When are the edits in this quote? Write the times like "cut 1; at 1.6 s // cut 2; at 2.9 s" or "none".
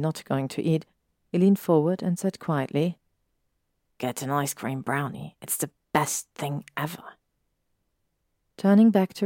none